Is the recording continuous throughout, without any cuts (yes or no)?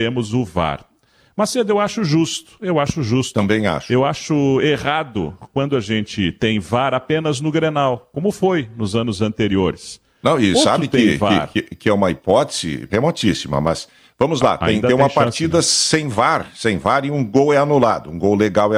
no